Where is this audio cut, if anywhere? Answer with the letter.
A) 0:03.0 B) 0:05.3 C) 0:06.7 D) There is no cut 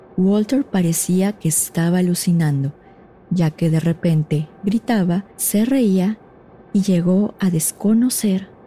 B